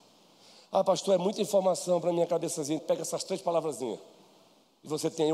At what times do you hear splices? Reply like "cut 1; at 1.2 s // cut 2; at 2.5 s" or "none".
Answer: cut 1; at 2.8 s